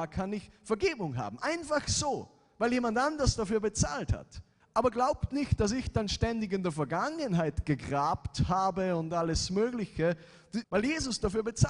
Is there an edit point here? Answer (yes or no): yes